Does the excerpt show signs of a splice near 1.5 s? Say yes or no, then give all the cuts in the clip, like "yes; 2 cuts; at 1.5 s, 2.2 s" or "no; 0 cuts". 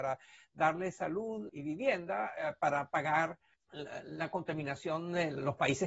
yes; 1 cut; at 1.5 s